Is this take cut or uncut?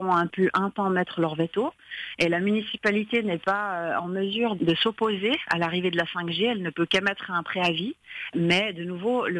cut